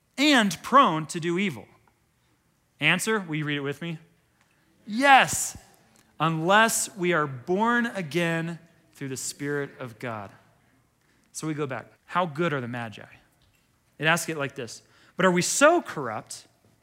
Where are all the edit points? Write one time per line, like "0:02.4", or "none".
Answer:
0:11.9
0:13.9